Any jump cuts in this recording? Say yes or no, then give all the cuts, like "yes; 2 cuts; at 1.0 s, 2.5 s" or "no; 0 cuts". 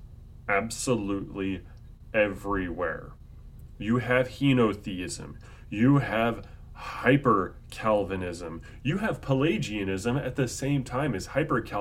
no; 0 cuts